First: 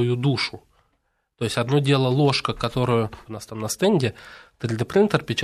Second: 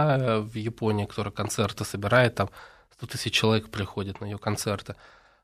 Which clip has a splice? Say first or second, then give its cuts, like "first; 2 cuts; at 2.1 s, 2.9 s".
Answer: first; 1 cut; at 3.3 s